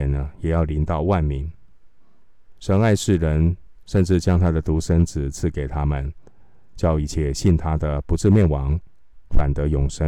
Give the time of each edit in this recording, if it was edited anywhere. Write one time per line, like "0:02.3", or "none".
none